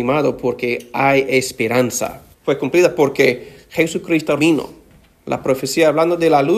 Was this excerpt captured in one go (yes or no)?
no